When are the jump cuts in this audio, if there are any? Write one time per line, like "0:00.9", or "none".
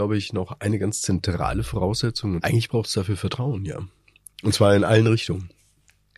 0:02.4
0:04.4